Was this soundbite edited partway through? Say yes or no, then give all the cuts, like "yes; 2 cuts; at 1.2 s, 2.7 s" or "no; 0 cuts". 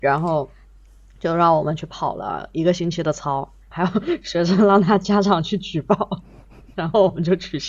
yes; 1 cut; at 3.6 s